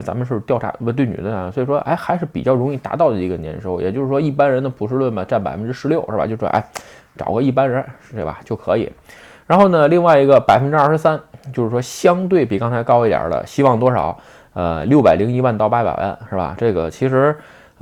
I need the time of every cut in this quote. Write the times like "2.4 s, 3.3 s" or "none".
none